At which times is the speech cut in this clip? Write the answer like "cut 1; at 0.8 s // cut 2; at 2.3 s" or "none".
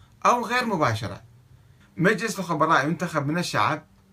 cut 1; at 1.8 s